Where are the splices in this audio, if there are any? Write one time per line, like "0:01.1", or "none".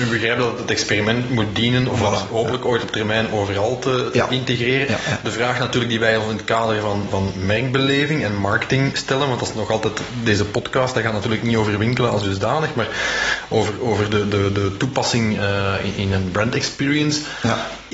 none